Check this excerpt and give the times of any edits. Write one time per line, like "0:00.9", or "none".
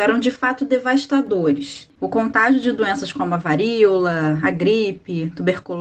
0:01.9